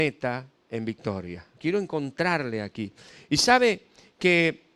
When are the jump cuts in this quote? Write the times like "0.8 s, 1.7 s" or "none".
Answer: 1.6 s

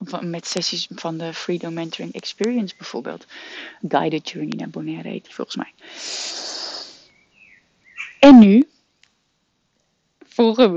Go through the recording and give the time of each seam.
3.8 s

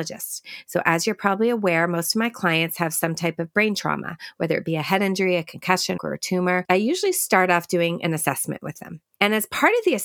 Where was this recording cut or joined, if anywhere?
6.0 s

